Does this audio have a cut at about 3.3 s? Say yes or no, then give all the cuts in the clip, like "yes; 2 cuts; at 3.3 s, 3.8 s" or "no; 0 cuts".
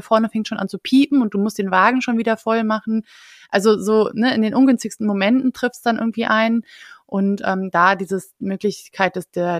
no; 0 cuts